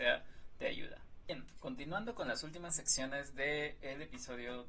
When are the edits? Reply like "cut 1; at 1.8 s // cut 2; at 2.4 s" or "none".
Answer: none

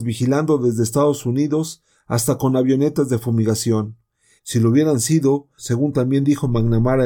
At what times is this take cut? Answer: cut 1; at 4.4 s // cut 2; at 5.6 s

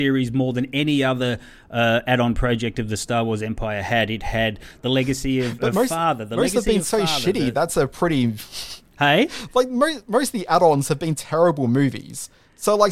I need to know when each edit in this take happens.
none

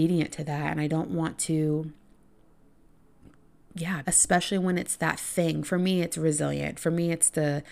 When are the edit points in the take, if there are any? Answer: cut 1; at 4.0 s

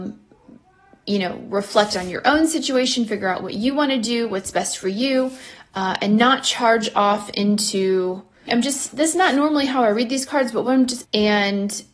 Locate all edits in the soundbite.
cut 1; at 8.5 s // cut 2; at 11.0 s

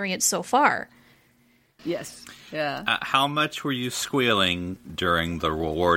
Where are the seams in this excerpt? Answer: cut 1; at 1.8 s

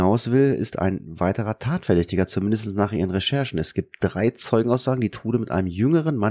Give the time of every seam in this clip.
none

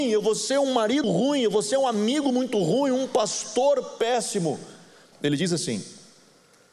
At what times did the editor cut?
cut 1; at 1.0 s // cut 2; at 5.1 s

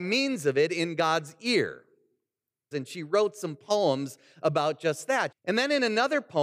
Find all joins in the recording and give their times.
cut 1; at 2.7 s // cut 2; at 5.3 s

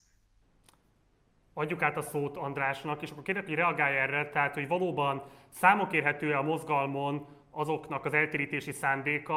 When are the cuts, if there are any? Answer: none

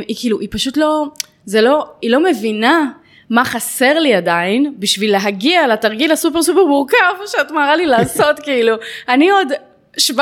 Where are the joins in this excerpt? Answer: none

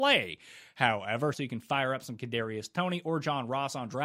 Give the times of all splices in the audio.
cut 1; at 1.3 s

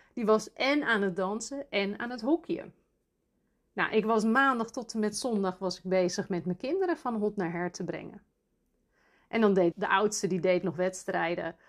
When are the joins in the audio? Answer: cut 1; at 9.7 s

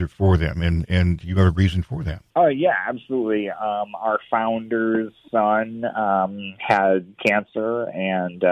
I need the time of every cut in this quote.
cut 1; at 2.3 s

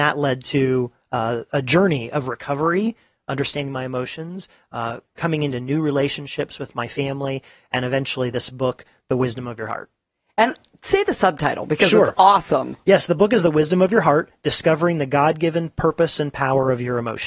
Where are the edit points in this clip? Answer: none

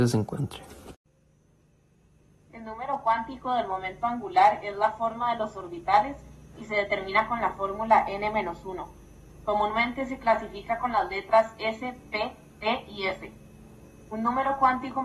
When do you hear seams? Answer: none

